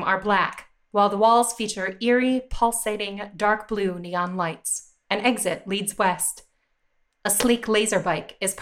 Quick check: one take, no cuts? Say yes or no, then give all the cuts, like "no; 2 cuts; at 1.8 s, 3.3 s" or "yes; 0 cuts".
yes; 0 cuts